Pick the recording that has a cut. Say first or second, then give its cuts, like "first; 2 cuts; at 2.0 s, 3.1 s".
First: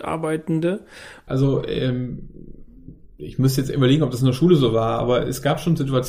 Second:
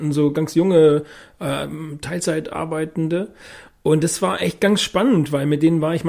first; 1 cut; at 1.3 s